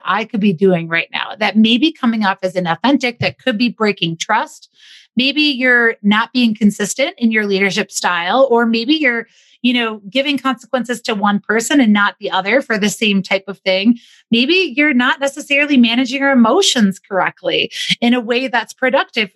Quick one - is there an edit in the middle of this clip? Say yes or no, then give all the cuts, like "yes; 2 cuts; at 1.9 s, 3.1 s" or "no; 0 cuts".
no; 0 cuts